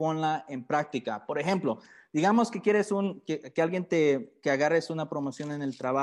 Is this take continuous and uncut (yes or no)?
yes